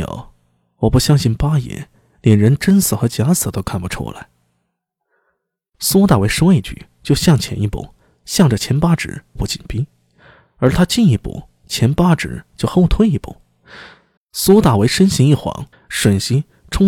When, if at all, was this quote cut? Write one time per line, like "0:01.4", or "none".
0:09.4
0:14.2
0:15.7